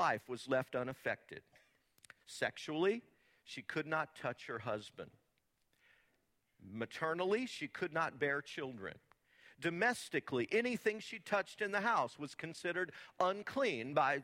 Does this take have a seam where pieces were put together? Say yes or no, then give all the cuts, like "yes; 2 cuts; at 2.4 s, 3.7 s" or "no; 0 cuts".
no; 0 cuts